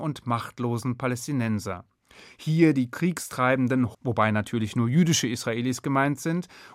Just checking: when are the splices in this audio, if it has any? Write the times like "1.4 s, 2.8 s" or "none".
3.9 s